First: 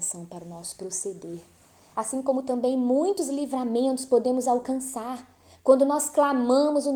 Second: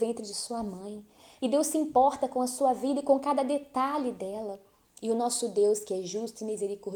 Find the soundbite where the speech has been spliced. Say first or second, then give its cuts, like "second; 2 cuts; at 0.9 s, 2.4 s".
second; 1 cut; at 4.8 s